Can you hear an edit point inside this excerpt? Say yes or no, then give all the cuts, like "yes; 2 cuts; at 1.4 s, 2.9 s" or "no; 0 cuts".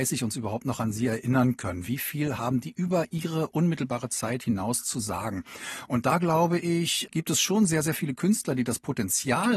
yes; 1 cut; at 7.1 s